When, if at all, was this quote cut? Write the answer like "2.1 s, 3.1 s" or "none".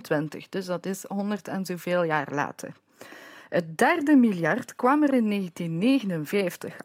none